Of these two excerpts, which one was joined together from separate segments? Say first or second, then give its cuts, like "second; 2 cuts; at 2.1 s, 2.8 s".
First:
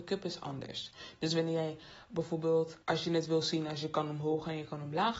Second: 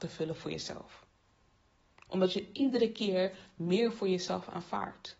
first; 1 cut; at 2.8 s